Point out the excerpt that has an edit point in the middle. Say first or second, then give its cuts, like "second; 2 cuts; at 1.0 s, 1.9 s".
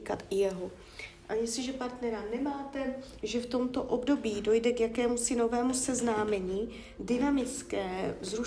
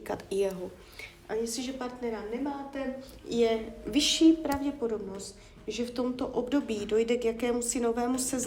first; 2 cuts; at 3.2 s, 7.0 s